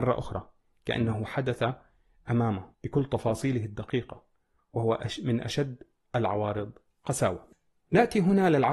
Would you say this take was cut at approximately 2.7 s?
yes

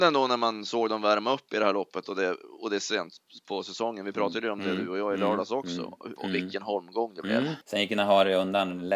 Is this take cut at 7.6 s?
yes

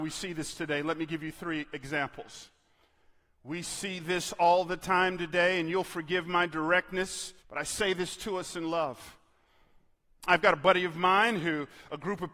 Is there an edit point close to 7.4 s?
yes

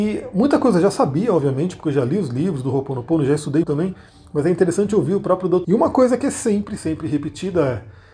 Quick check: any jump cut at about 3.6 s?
yes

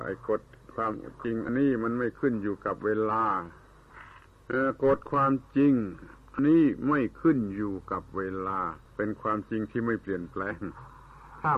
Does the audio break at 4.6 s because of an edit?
no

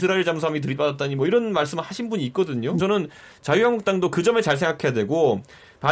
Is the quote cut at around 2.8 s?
yes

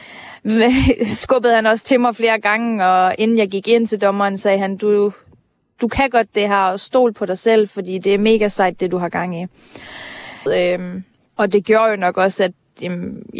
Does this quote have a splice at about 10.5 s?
yes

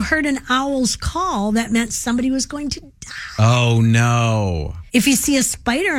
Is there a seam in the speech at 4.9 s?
yes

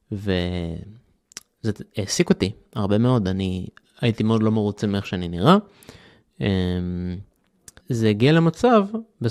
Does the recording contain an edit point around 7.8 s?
yes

